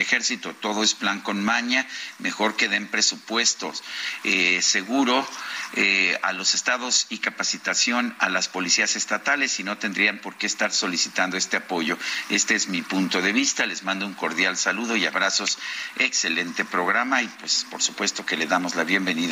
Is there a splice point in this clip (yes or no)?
no